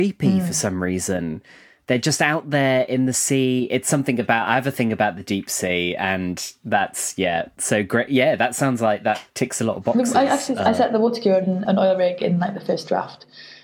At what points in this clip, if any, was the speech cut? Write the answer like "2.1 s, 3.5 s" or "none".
9.3 s, 11.6 s